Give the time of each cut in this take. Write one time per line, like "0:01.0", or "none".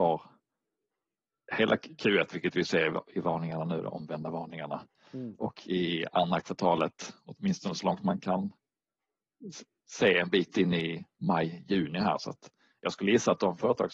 none